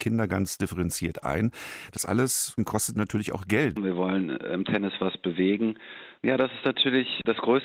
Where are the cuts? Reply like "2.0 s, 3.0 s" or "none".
3.8 s, 6.2 s